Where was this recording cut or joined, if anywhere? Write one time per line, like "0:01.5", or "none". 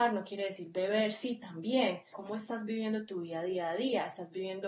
0:02.1